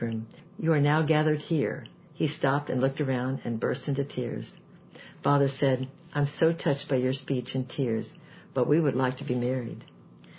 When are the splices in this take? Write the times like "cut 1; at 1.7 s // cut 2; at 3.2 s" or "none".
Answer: none